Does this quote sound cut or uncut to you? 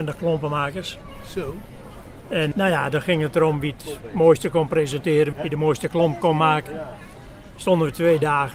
cut